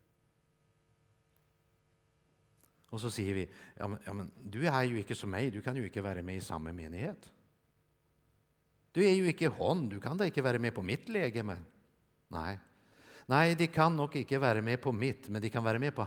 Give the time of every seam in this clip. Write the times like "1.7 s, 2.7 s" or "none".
none